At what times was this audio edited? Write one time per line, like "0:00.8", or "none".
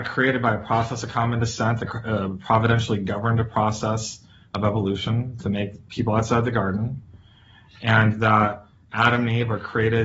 none